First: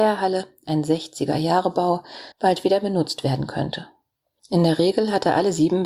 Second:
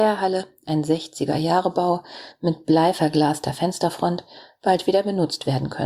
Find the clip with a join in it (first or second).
first